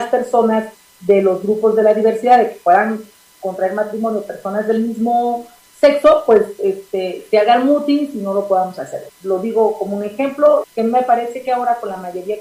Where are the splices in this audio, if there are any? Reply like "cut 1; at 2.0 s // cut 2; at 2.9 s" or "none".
cut 1; at 9.1 s // cut 2; at 10.6 s